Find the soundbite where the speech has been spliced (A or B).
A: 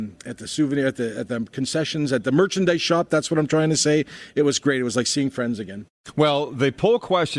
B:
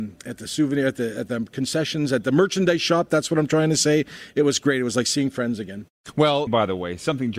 B